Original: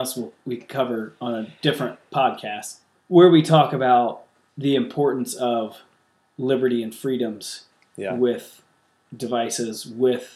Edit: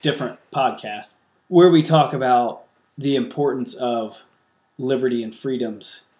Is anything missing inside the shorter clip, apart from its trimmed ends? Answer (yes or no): no